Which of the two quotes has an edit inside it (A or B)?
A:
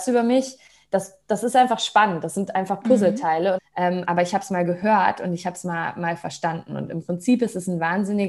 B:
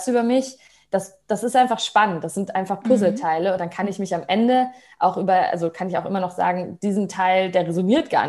A